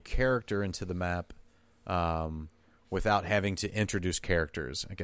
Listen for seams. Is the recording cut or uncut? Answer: uncut